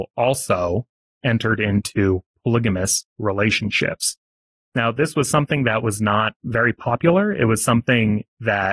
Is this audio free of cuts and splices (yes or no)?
yes